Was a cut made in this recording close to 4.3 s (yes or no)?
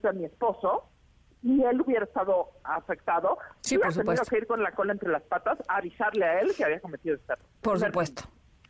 no